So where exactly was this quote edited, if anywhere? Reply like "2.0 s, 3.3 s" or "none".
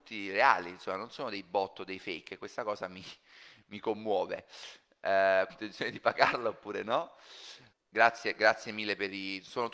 5.5 s, 7.7 s